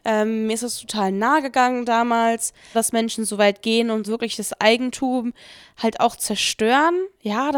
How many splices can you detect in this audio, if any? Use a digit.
2